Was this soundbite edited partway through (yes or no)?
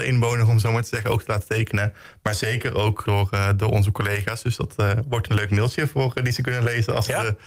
yes